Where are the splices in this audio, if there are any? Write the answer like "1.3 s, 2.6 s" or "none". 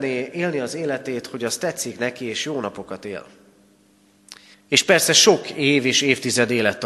4.5 s